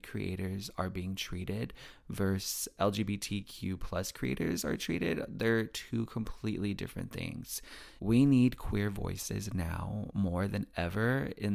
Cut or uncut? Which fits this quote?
cut